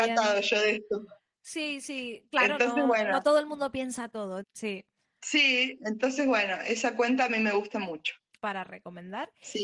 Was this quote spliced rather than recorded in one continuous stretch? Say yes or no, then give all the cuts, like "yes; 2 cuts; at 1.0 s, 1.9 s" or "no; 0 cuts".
yes; 2 cuts; at 4.4 s, 8.3 s